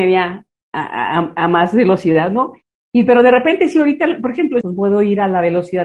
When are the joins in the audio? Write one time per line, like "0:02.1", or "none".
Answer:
0:04.6

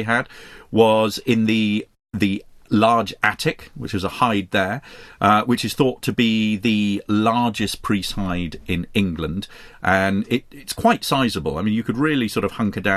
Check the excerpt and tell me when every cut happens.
none

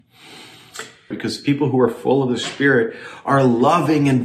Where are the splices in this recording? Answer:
0:01.1

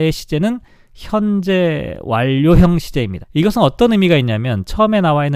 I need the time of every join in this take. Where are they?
0:03.2

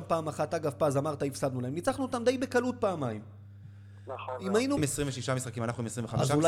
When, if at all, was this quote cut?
0:04.8

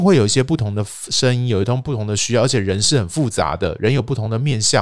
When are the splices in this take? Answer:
none

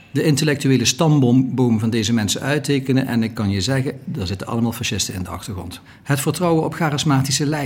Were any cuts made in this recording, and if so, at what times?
0:05.9

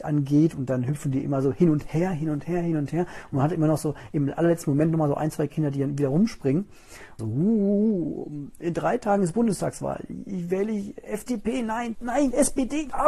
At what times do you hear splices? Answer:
0:07.2
0:11.9

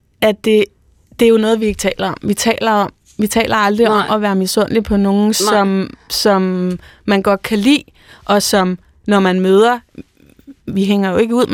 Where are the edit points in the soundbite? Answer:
none

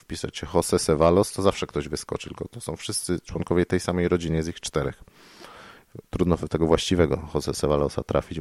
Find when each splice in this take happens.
none

